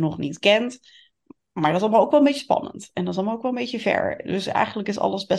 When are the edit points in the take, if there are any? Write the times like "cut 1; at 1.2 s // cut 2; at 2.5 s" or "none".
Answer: none